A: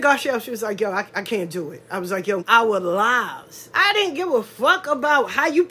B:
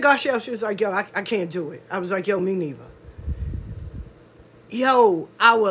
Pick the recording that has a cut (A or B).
A